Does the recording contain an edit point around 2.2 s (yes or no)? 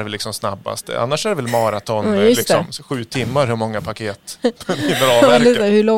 no